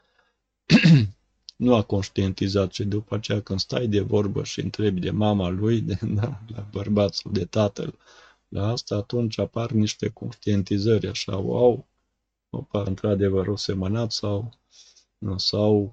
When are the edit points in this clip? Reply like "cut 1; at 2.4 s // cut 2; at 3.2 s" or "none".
cut 1; at 12.9 s

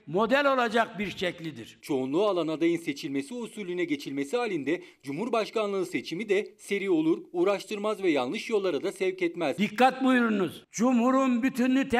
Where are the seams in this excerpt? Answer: cut 1; at 1.8 s // cut 2; at 10.6 s

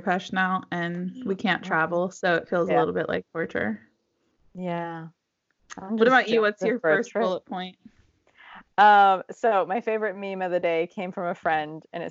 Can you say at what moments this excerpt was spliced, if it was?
none

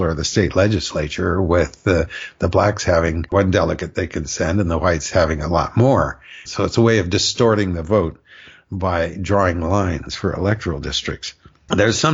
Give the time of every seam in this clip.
cut 1; at 6.4 s

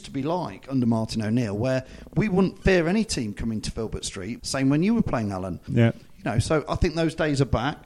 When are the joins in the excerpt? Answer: cut 1; at 4.4 s // cut 2; at 5.7 s

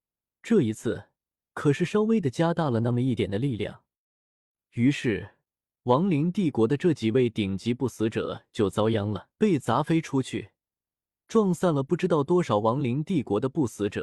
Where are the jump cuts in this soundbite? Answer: cut 1; at 1.5 s // cut 2; at 3.2 s // cut 3; at 9.3 s

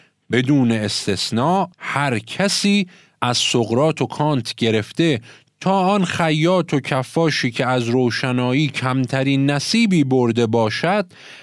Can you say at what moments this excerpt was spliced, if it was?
cut 1; at 1.7 s

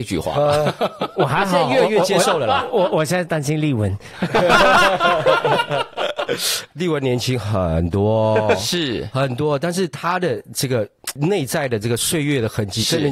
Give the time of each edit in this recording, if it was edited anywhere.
none

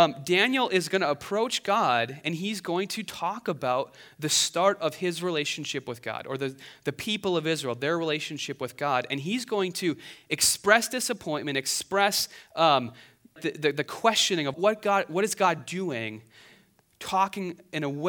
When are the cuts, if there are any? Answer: cut 1; at 13.4 s // cut 2; at 14.5 s

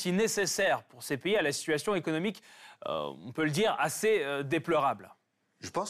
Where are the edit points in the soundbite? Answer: none

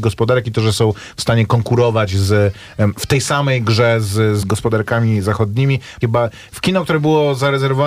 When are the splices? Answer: cut 1; at 4.4 s // cut 2; at 6.0 s

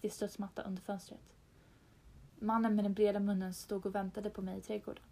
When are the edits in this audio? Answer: cut 1; at 2.3 s

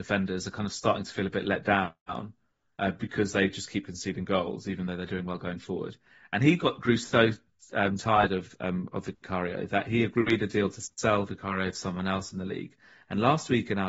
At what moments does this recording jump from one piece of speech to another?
none

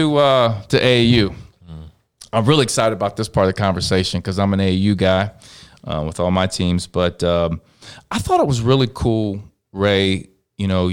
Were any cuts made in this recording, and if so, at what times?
none

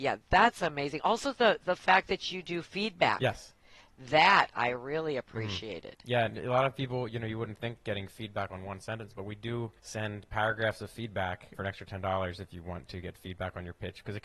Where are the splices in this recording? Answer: cut 1; at 9.8 s // cut 2; at 11.5 s

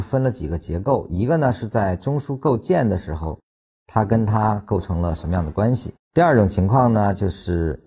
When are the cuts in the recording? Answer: cut 1; at 6.0 s

